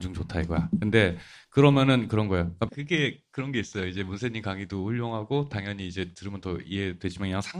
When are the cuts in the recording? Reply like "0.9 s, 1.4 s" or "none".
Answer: 2.7 s